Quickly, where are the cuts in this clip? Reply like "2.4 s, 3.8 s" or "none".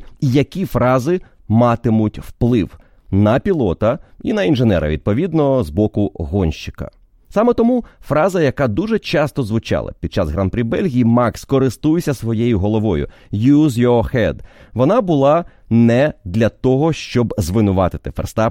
none